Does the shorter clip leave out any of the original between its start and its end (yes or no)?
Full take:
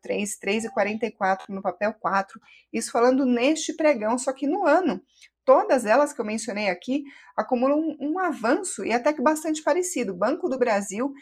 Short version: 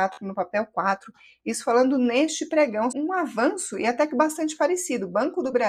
yes